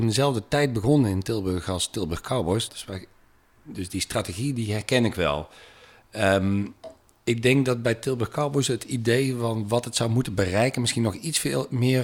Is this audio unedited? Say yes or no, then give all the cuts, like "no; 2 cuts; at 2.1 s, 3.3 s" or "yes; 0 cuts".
no; 1 cut; at 2.7 s